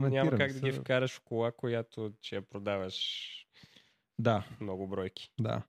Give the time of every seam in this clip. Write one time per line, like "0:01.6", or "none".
none